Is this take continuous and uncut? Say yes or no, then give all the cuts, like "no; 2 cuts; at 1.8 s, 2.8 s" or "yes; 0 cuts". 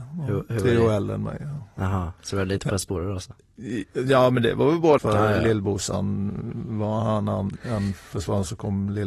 no; 1 cut; at 5.0 s